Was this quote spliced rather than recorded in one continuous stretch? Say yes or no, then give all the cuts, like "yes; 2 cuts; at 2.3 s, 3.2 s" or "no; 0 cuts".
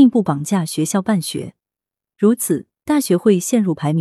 no; 0 cuts